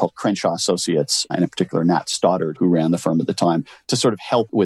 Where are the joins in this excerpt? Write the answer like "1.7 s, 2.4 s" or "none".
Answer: none